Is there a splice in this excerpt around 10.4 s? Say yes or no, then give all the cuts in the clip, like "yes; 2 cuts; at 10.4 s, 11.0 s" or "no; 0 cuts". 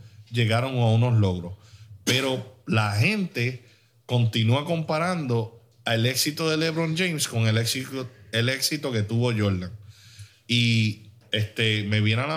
no; 0 cuts